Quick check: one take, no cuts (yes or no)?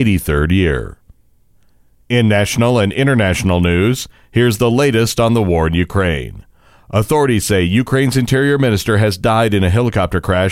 yes